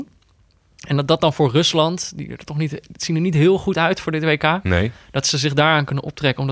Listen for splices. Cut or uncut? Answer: uncut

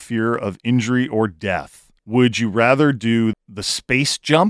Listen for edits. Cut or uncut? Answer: cut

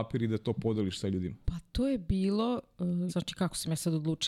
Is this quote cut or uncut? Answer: cut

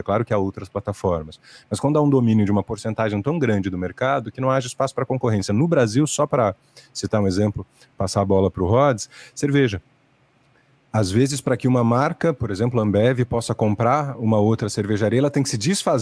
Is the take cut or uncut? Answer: uncut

